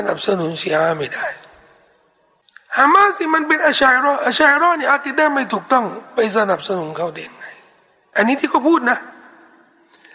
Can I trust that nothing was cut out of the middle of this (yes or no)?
yes